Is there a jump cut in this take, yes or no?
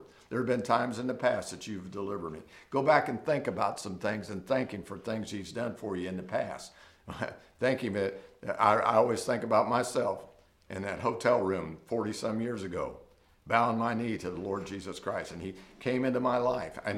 no